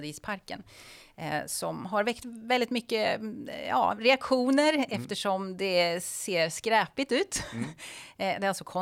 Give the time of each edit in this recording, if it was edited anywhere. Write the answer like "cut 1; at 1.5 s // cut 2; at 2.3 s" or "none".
none